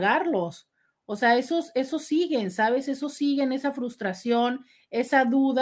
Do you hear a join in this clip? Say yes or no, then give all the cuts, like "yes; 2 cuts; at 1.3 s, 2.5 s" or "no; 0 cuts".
no; 0 cuts